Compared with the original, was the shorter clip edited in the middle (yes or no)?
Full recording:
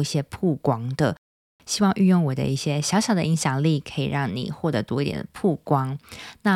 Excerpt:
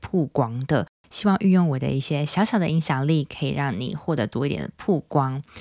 yes